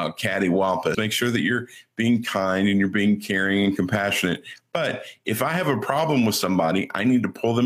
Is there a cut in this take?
yes; 1 cut; at 0.9 s

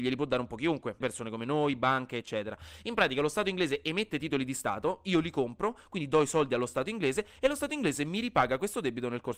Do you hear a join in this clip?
yes; 1 cut; at 1.0 s

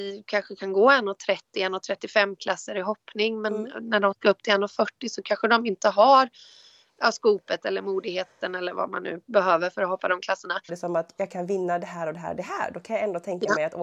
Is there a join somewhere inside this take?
yes; 1 cut; at 10.7 s

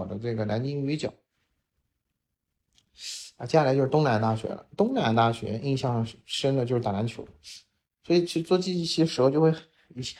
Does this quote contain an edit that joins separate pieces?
no; 0 cuts

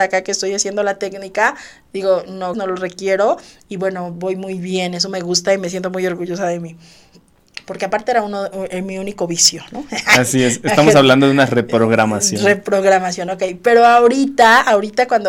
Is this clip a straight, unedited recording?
no; 1 cut; at 2.5 s

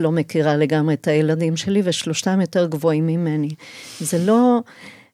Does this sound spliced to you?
no; 0 cuts

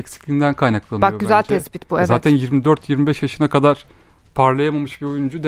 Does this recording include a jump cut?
no; 0 cuts

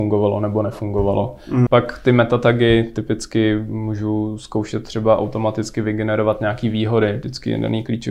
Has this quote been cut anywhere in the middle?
yes; 1 cut; at 1.7 s

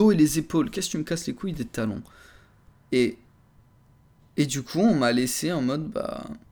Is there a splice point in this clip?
no; 0 cuts

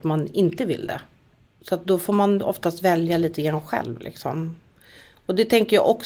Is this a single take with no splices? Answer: yes; 0 cuts

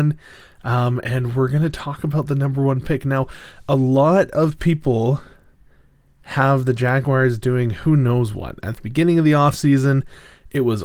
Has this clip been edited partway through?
no; 0 cuts

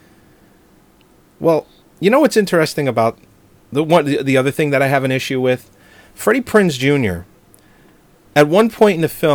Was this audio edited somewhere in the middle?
no; 0 cuts

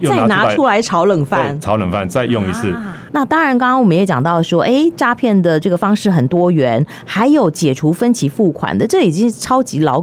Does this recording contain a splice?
yes; 1 cut; at 3.1 s

